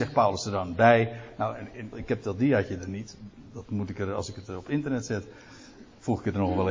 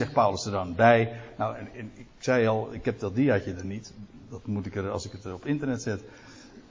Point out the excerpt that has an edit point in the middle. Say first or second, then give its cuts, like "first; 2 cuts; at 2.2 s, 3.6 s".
first; 1 cut; at 1.9 s